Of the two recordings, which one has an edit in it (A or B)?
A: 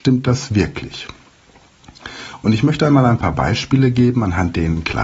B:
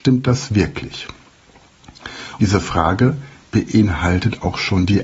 B